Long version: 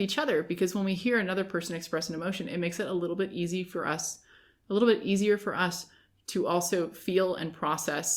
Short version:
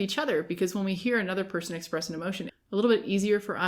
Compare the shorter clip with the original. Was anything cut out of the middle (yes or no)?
yes